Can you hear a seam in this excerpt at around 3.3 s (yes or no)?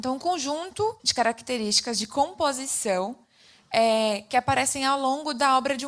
no